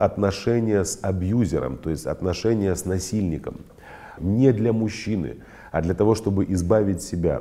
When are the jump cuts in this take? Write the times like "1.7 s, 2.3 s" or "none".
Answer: 4.2 s